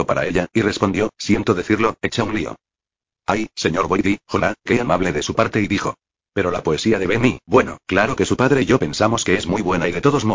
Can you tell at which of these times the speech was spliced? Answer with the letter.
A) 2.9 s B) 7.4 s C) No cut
C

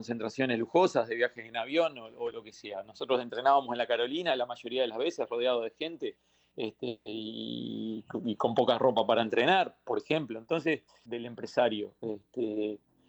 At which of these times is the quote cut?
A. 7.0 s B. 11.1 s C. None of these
B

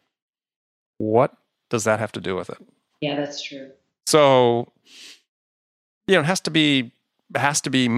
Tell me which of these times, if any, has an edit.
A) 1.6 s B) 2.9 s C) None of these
C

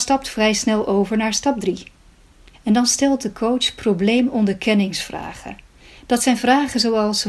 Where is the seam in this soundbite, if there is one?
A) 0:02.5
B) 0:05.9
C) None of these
A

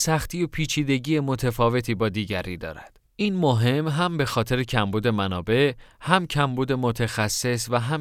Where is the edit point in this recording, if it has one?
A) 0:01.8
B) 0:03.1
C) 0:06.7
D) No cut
B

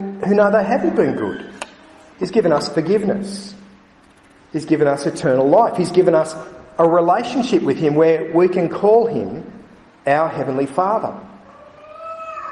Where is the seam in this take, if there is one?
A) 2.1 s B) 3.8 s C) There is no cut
A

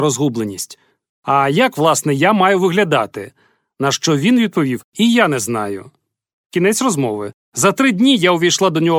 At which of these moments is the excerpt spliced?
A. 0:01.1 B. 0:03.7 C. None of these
A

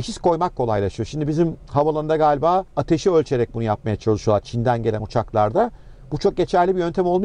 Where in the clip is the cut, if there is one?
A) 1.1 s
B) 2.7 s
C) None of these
B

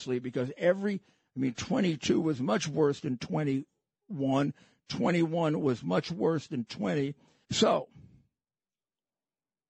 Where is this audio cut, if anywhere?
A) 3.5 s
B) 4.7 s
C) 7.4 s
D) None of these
C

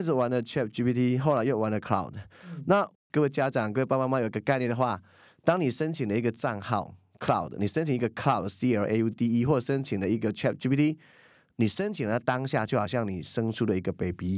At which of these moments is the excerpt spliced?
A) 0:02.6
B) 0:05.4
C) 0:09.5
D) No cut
D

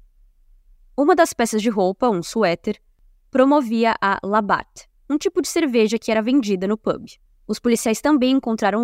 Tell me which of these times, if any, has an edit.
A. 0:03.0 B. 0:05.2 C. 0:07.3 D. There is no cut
C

